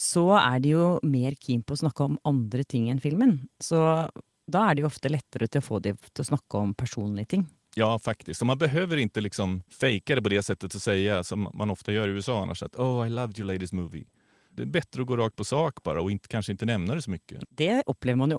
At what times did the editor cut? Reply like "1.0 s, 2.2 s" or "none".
17.4 s

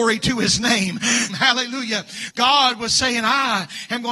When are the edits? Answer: 1.3 s, 2.3 s

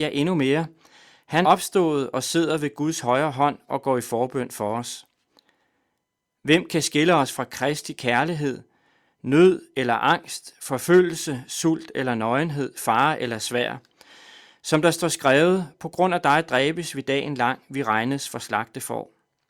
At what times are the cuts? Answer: 1.4 s

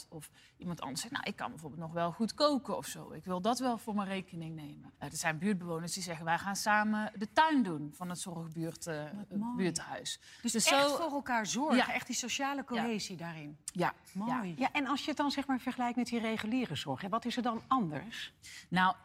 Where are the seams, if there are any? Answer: 5.0 s

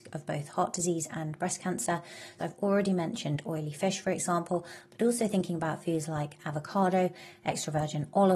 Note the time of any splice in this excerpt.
2.4 s

